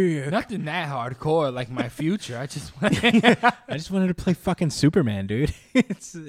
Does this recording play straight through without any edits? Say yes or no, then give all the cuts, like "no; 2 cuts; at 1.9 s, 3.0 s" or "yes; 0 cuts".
yes; 0 cuts